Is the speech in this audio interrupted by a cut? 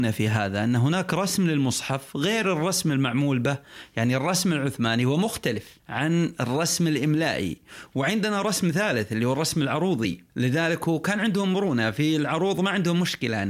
yes; 2 cuts; at 5.8 s, 10.3 s

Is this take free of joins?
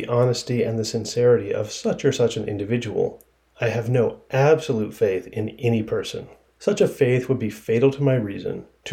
yes; 0 cuts

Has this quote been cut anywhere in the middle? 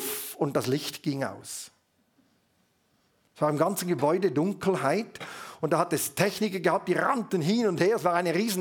no; 0 cuts

